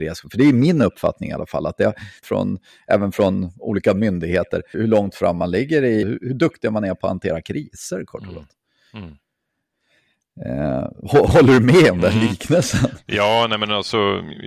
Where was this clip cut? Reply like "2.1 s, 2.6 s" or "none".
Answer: 2.2 s, 4.7 s, 6.0 s